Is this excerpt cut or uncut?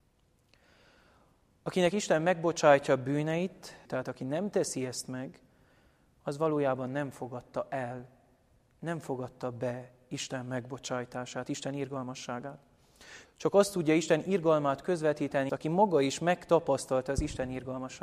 cut